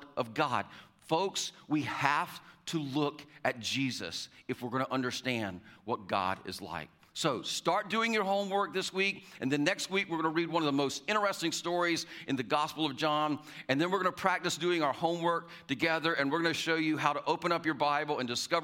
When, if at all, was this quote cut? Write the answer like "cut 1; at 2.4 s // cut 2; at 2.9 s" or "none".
none